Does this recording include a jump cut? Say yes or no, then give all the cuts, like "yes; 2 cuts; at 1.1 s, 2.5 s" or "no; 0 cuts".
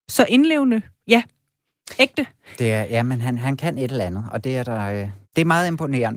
yes; 1 cut; at 5.2 s